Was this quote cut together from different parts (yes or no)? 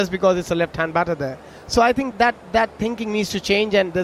yes